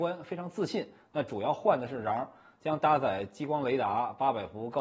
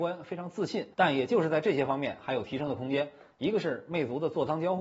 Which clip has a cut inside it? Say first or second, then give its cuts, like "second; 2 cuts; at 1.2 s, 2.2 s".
second; 1 cut; at 0.9 s